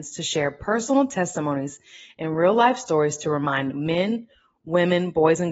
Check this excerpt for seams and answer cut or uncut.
uncut